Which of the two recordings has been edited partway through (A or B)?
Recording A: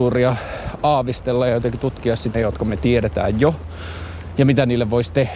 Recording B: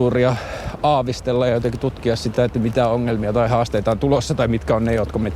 A